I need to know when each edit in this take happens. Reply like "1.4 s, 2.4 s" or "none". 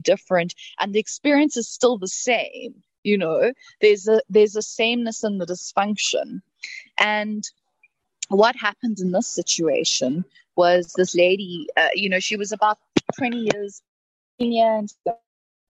none